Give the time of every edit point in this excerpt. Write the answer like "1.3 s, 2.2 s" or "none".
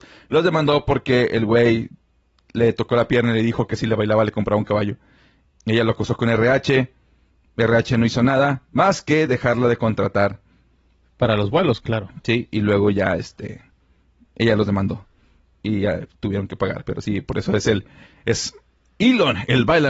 5.6 s